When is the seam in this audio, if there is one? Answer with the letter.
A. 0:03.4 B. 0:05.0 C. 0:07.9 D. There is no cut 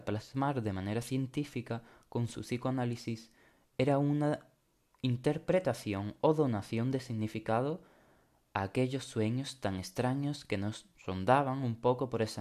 D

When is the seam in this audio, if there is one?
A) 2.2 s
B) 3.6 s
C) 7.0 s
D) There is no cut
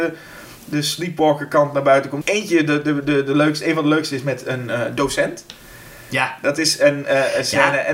A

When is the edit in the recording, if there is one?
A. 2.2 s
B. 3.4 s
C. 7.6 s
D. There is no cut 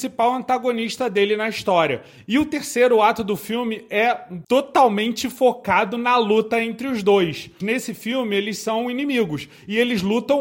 C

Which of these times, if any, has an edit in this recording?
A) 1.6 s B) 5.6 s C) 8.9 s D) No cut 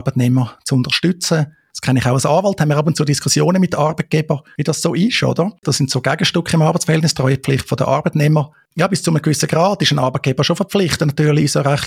B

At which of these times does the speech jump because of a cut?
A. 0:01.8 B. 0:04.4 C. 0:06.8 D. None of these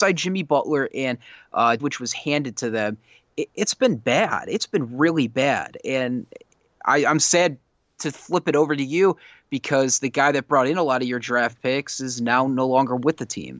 A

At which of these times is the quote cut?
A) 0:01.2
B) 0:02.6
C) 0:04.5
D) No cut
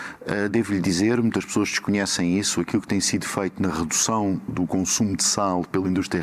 C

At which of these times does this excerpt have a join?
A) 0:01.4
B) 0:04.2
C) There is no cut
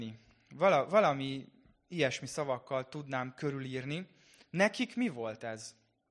C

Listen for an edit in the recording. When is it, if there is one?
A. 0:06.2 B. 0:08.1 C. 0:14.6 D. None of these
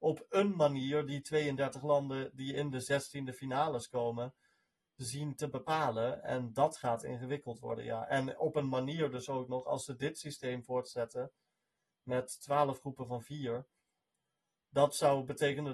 D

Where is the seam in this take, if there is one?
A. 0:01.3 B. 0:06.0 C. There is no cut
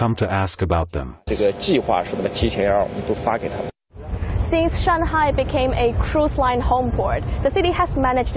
A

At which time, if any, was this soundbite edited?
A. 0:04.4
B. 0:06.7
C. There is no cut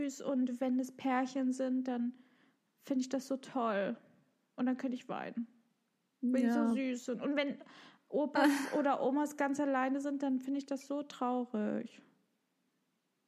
C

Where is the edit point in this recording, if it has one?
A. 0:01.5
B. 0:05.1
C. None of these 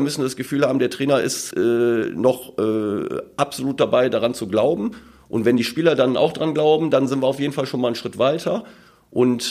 A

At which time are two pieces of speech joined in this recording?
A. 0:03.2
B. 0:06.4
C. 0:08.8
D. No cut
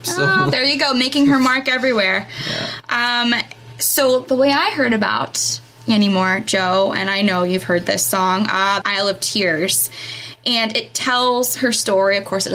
C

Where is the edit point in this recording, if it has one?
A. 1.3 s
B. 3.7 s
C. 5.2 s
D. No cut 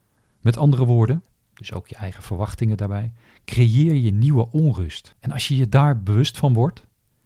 A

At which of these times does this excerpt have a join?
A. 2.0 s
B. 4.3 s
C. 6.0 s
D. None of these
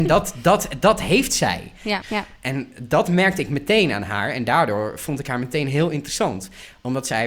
A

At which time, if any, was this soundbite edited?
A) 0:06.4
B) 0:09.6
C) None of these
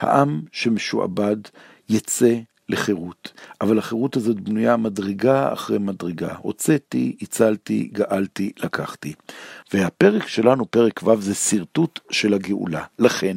B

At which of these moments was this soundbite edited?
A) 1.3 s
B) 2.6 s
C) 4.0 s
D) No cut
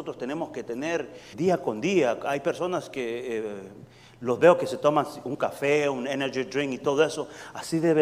A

